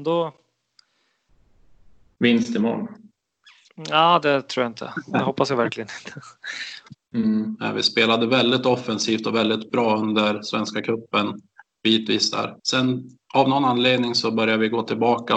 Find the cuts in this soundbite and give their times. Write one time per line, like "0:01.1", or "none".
0:06.9
0:12.6